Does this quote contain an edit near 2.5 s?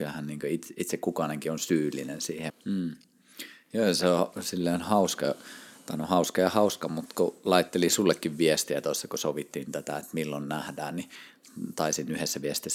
yes; 1 cut; at 2.5 s

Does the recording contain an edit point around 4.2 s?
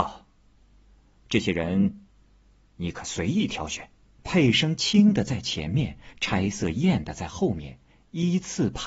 yes; 1 cut; at 4.2 s

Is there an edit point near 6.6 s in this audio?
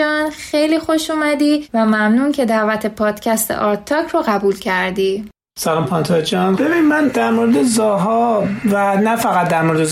yes; 1 cut; at 6.6 s

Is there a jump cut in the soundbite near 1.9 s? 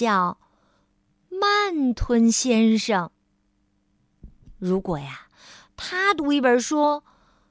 yes; 1 cut; at 1.9 s

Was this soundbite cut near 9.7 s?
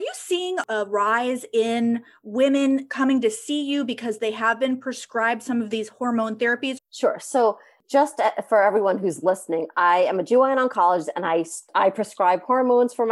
no; 1 cut; at 6.8 s

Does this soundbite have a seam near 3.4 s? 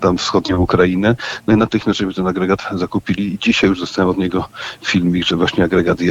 no; 0 cuts

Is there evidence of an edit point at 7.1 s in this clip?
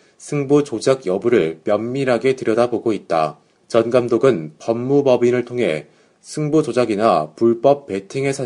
no; 1 cut; at 3.6 s

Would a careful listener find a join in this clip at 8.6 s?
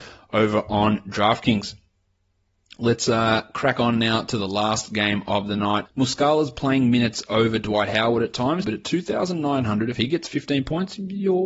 yes; 2 cuts; at 5.8 s, 8.6 s

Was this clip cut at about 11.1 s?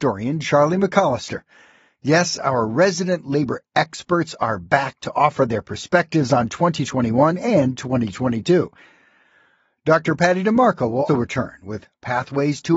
yes; 1 cut; at 11.1 s

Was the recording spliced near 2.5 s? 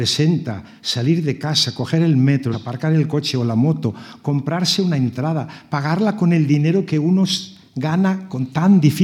yes; 1 cut; at 2.5 s

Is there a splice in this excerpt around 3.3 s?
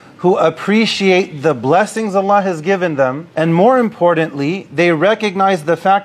yes; 1 cut; at 3.3 s

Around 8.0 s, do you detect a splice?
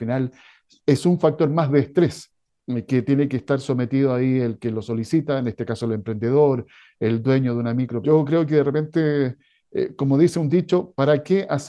yes; 1 cut; at 8.0 s

